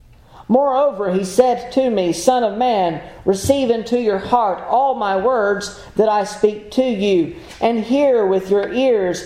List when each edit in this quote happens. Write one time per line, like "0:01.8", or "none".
none